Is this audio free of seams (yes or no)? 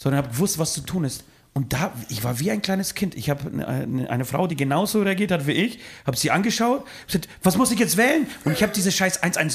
no